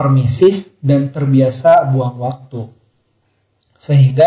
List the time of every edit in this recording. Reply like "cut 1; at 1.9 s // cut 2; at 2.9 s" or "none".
none